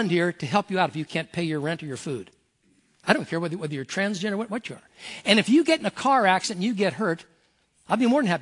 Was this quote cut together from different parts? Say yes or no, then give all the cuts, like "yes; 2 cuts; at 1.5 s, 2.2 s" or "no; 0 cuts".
no; 0 cuts